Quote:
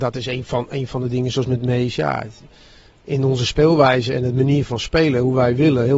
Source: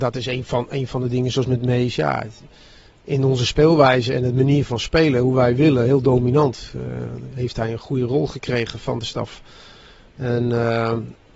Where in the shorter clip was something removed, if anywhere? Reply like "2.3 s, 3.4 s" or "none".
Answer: none